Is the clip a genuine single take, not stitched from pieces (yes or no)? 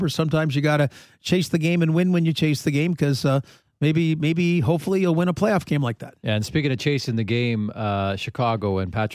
yes